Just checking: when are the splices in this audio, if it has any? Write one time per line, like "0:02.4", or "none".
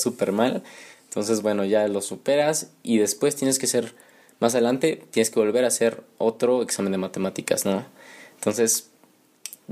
none